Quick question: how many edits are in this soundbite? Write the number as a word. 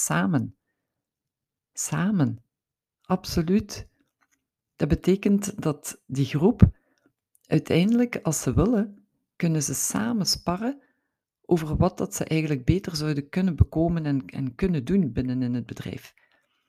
zero